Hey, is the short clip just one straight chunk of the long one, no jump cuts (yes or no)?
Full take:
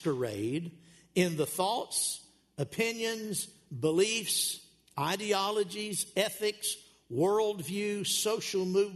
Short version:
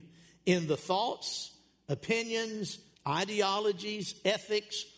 no